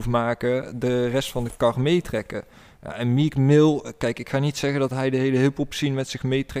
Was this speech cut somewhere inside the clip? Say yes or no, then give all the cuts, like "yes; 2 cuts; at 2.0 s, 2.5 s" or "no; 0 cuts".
no; 0 cuts